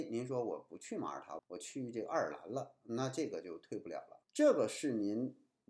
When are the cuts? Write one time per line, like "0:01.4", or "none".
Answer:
0:01.4
0:04.2